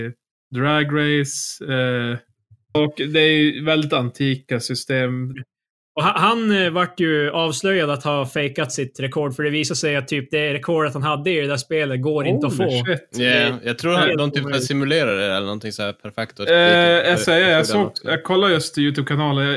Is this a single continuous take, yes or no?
no